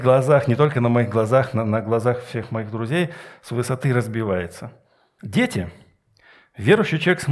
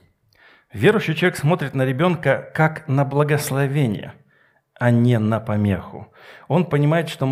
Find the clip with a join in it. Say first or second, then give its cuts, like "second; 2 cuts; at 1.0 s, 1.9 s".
first; 1 cut; at 5.2 s